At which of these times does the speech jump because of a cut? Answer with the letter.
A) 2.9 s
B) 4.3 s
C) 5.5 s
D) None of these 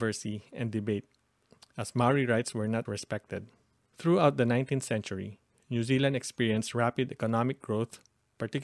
A